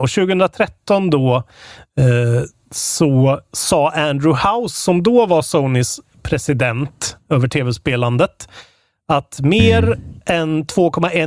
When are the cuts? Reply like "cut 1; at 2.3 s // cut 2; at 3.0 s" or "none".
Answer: none